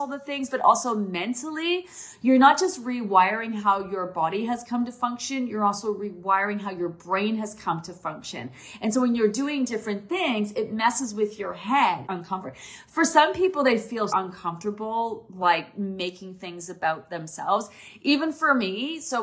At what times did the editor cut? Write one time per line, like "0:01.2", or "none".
0:12.0
0:14.1